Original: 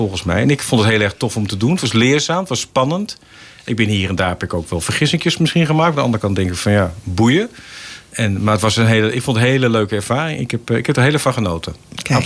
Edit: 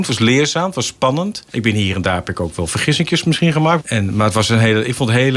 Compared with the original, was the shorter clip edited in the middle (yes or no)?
yes